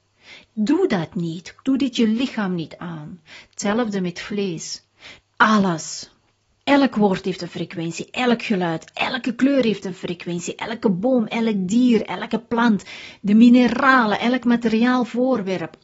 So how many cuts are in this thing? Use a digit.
2